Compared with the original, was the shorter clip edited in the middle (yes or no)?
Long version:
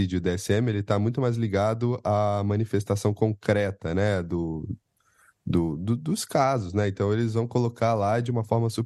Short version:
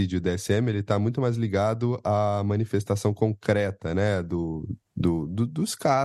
yes